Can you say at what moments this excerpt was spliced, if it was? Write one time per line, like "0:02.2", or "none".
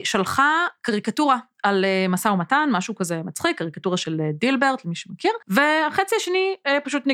0:05.4